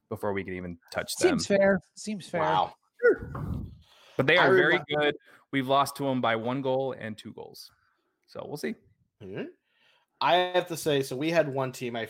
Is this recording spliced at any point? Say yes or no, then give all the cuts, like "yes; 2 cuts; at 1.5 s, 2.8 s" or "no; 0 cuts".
no; 0 cuts